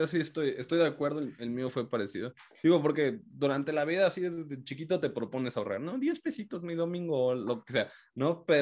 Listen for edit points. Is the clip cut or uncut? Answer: uncut